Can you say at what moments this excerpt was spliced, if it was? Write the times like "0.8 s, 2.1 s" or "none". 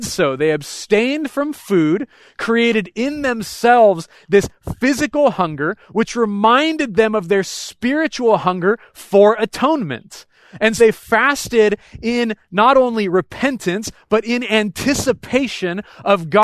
10.8 s